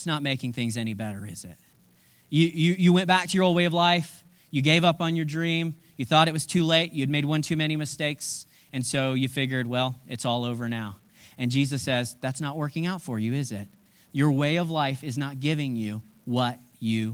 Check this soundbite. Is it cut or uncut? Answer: uncut